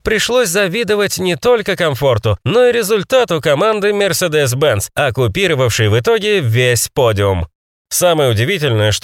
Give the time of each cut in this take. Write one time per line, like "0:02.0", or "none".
none